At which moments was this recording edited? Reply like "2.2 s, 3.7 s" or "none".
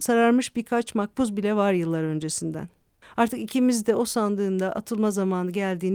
3.0 s